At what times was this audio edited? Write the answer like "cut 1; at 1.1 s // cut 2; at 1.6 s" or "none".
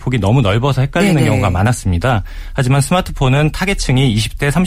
none